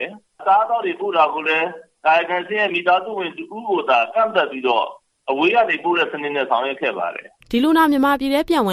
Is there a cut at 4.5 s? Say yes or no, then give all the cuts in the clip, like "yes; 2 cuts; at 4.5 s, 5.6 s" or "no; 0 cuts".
no; 1 cut; at 7.4 s